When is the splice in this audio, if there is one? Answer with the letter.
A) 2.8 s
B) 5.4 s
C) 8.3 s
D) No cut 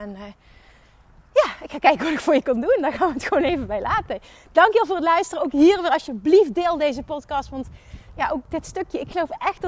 D